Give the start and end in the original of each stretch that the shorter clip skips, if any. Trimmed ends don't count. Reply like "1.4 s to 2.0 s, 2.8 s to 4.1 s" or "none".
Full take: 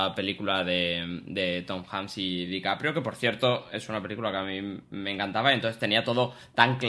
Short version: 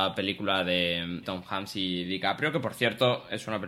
1.2 s to 1.6 s